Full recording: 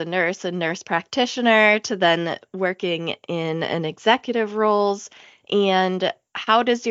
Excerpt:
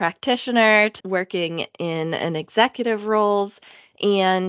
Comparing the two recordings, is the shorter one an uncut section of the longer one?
no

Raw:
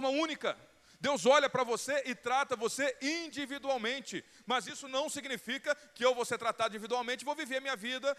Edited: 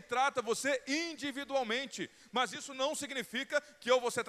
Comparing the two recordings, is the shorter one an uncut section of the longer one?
yes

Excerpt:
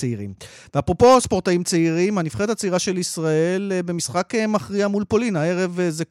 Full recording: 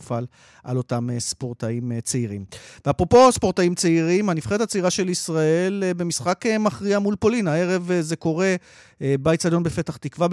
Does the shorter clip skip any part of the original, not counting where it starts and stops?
no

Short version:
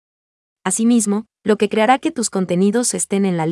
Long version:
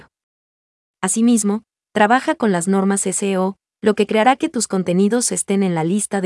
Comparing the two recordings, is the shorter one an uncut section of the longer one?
no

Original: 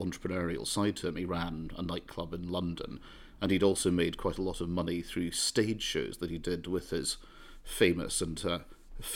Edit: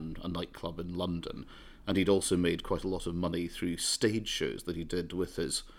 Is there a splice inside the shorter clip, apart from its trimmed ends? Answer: no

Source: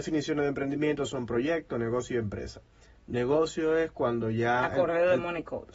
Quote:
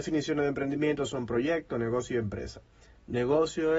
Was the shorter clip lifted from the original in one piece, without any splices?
yes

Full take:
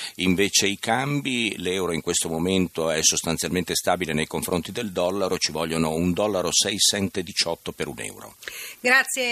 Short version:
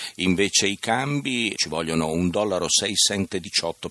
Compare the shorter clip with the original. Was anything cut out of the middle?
yes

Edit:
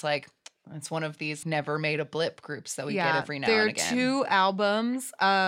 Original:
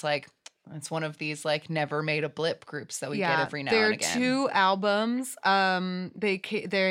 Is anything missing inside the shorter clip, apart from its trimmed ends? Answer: yes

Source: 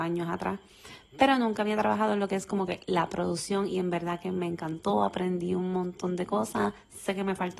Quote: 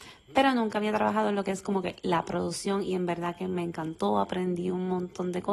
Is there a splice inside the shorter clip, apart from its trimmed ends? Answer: no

